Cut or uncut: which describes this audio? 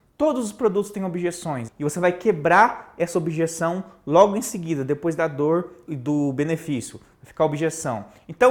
cut